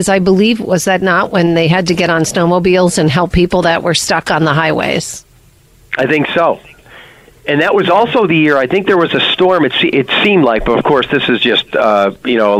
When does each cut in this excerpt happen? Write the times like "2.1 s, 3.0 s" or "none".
none